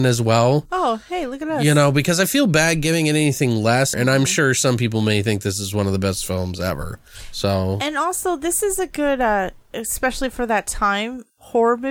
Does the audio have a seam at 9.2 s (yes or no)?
no